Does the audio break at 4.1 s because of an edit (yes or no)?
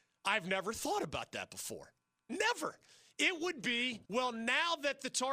yes